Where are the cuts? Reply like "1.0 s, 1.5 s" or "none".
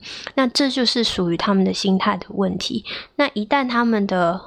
none